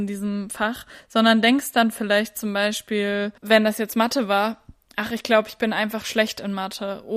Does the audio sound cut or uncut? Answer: cut